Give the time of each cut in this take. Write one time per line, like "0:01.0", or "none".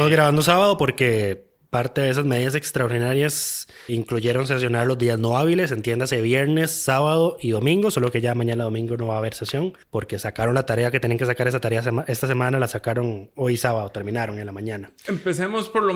0:03.9
0:09.8